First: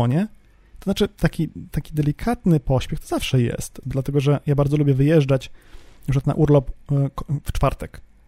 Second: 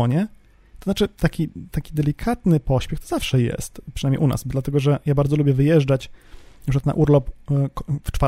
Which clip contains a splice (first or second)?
first